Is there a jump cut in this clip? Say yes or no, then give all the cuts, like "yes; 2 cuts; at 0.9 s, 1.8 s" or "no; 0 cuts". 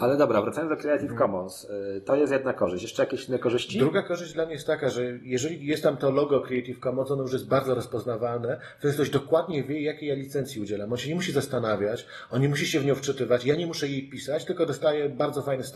no; 0 cuts